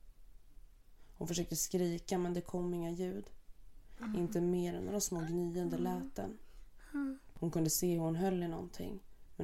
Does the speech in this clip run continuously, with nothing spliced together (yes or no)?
no